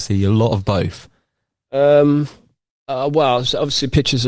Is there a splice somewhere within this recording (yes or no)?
no